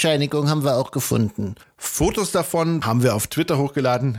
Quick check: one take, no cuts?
no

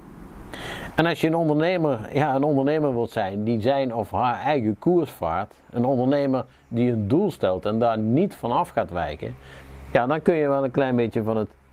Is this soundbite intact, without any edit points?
no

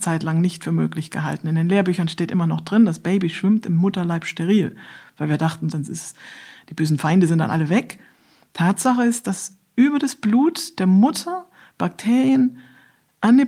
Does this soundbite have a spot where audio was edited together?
yes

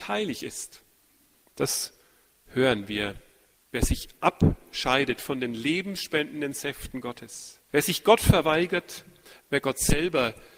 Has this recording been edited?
yes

